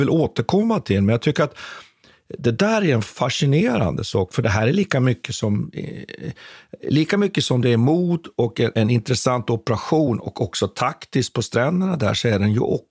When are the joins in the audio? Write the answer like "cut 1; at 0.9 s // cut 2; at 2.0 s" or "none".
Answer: cut 1; at 8.7 s